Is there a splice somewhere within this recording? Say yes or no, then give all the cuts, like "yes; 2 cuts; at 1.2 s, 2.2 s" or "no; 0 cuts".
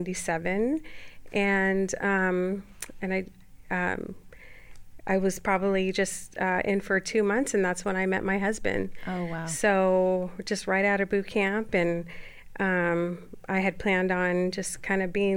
no; 0 cuts